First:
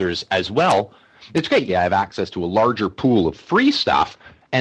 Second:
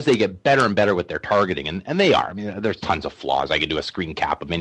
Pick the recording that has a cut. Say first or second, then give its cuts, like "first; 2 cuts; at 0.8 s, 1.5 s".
first; 1 cut; at 1.7 s